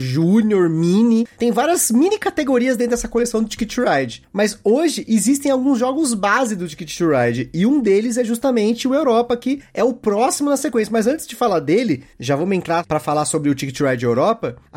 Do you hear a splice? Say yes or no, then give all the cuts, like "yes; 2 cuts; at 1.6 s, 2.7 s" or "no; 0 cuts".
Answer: no; 0 cuts